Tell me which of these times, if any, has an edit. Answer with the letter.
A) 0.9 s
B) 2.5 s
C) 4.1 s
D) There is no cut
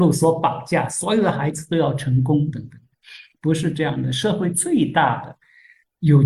B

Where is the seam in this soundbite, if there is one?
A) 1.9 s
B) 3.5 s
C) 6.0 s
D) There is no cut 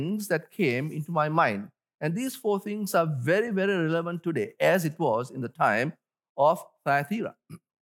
D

